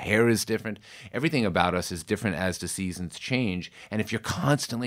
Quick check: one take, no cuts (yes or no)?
yes